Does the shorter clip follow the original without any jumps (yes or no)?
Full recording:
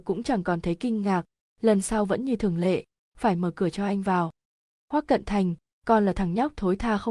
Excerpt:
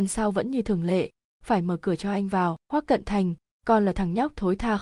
no